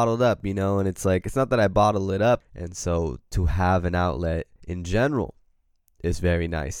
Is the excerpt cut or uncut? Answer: cut